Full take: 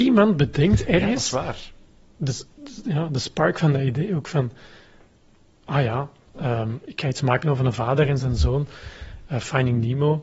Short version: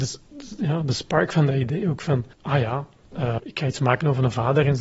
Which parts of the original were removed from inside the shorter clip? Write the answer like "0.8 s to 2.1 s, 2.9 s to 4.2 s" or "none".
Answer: 4.6 s to 5.6 s, 6.6 s to 6.8 s